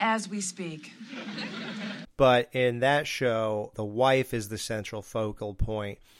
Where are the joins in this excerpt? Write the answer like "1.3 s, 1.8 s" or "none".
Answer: 2.0 s, 3.7 s